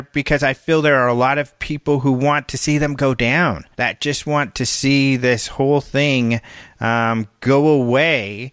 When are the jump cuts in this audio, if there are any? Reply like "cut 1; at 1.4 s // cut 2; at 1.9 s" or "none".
cut 1; at 3.7 s